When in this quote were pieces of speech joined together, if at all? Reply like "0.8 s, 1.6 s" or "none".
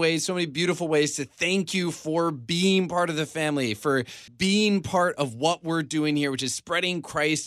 4.3 s